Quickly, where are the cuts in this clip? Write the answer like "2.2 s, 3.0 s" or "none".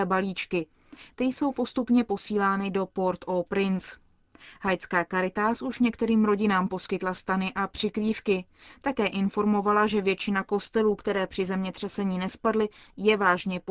none